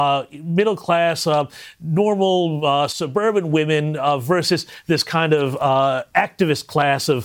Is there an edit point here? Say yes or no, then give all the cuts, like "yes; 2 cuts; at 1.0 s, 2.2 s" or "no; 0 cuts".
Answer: no; 0 cuts